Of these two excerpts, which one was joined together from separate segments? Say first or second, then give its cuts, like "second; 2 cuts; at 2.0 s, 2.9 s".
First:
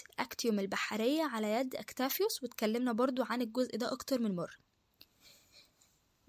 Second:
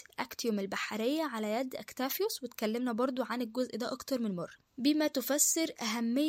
second; 1 cut; at 4.7 s